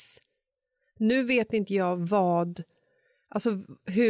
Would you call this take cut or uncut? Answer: uncut